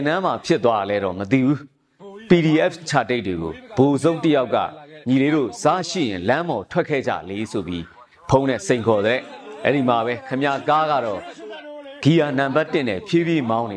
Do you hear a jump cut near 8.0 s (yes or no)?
no